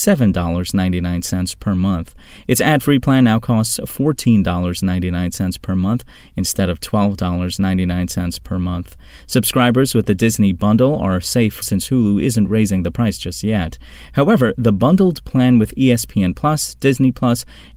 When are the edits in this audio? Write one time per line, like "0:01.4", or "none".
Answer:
0:11.6